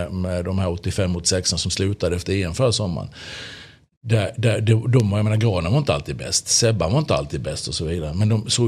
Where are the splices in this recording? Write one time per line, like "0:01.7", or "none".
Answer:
none